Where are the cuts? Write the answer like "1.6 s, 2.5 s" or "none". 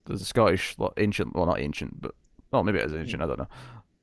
none